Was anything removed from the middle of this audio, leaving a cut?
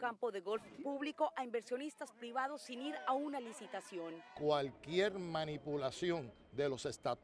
no; 0 cuts

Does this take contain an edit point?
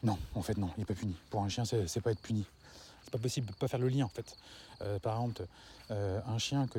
yes; 1 cut; at 3.0 s

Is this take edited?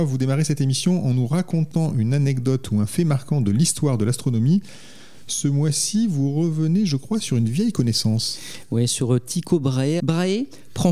yes; 1 cut; at 10.0 s

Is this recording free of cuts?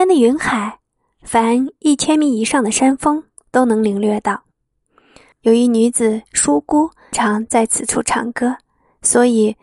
no; 2 cuts; at 5.3 s, 7.1 s

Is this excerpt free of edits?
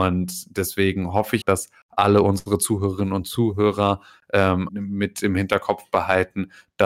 no; 2 cuts; at 1.4 s, 4.7 s

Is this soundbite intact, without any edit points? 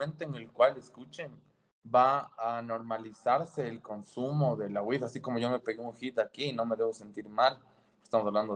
yes; 0 cuts

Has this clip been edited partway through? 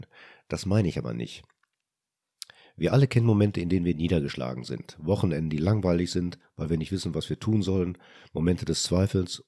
no; 0 cuts

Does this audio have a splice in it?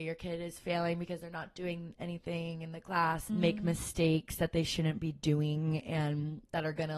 yes; 1 cut; at 3.3 s

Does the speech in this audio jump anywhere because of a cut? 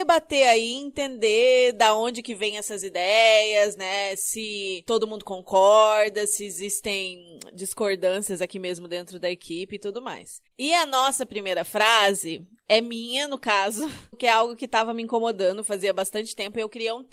yes; 1 cut; at 10.5 s

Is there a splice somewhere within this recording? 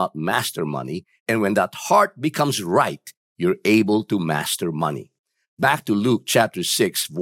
yes; 1 cut; at 1.2 s

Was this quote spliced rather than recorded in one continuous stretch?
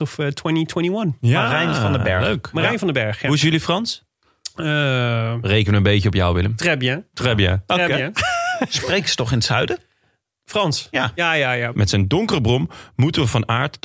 yes; 1 cut; at 11.7 s

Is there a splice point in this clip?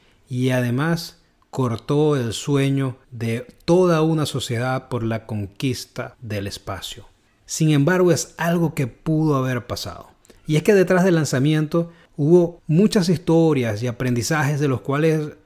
yes; 1 cut; at 7.4 s

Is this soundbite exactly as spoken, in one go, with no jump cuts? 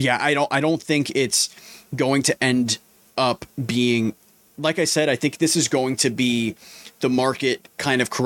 yes; 0 cuts

